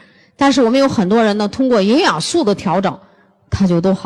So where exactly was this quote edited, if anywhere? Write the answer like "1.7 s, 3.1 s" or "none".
none